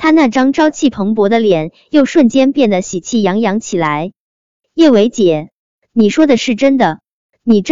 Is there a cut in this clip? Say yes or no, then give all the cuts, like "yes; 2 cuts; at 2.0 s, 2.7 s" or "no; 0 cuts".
no; 0 cuts